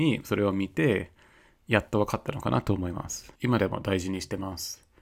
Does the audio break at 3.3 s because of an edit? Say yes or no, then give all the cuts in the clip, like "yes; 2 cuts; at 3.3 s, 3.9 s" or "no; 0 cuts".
yes; 1 cut; at 3.3 s